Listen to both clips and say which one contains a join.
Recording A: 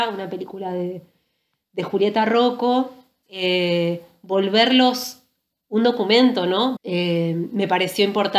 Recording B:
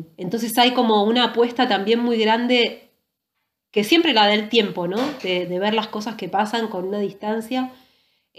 A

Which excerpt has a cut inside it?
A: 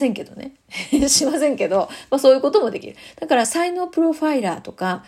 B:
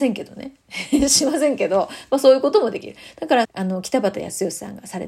B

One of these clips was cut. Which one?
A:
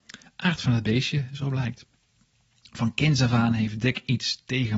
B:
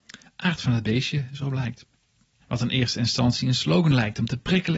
B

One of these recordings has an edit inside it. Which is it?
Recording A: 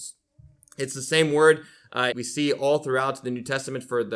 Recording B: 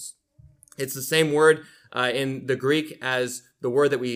A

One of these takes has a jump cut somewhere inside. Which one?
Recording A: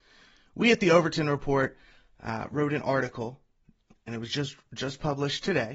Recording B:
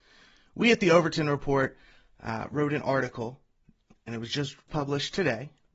B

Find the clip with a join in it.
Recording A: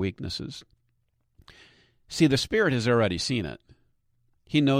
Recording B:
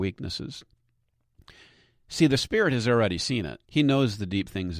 B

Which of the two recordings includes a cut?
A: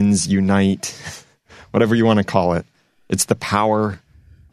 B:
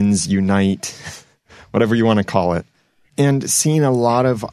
B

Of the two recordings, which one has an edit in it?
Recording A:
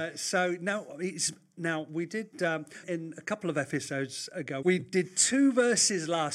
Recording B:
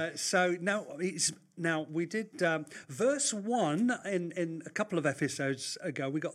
A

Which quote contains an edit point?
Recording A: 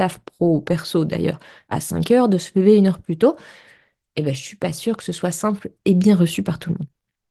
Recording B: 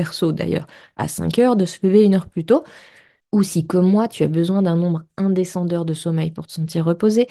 B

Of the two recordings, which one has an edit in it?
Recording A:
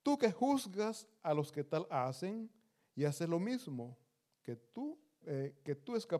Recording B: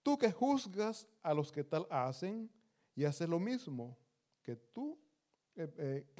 A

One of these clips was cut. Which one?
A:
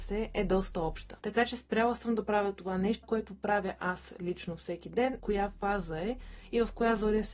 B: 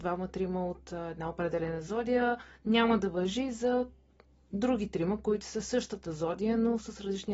A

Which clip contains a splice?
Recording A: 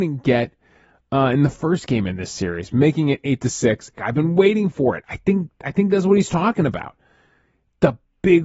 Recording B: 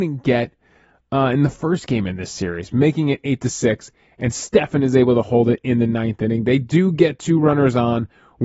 A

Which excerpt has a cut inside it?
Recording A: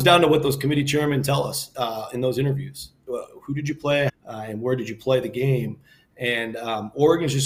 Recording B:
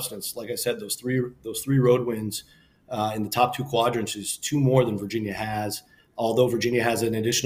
A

